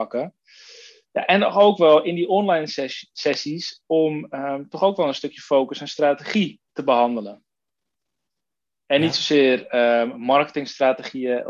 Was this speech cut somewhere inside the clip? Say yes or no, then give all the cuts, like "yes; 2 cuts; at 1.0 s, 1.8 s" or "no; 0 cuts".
yes; 1 cut; at 6.6 s